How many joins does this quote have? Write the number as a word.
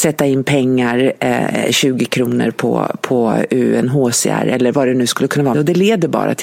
one